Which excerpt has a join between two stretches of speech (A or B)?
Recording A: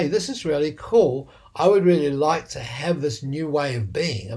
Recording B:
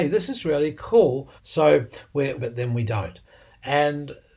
B